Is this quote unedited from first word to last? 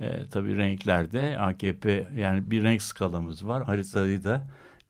no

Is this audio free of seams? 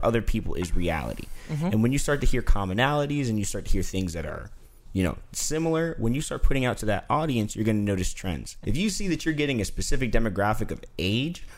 no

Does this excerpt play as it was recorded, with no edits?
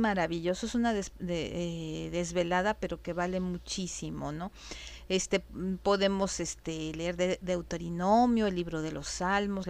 yes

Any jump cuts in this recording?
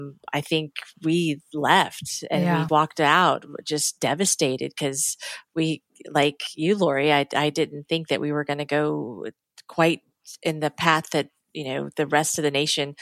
yes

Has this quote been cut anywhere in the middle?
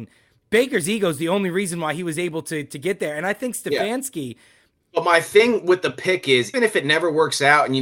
yes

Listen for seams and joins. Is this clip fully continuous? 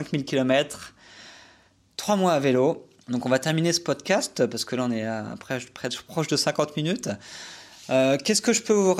no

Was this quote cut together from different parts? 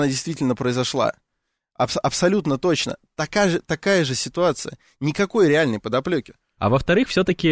yes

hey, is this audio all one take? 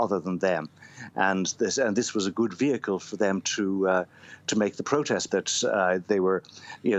no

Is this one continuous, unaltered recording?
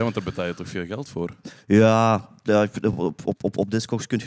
yes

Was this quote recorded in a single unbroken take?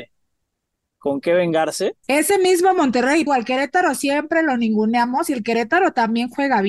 no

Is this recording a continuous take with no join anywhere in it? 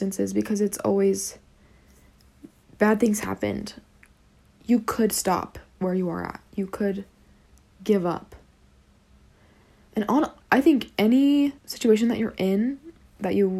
no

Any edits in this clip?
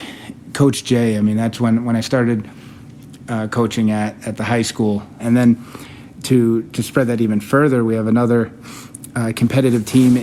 yes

